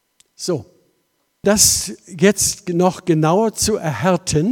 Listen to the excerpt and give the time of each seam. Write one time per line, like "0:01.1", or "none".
0:01.4